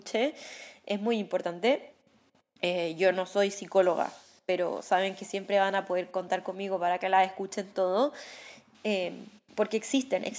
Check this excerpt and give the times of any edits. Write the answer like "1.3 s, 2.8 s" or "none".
8.7 s